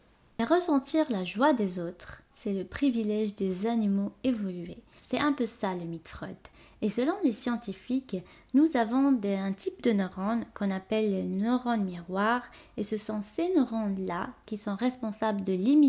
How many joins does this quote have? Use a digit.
2